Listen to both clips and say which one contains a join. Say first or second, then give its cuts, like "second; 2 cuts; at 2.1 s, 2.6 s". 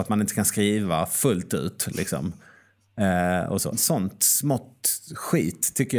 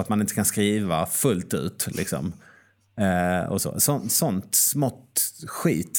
first; 1 cut; at 3.7 s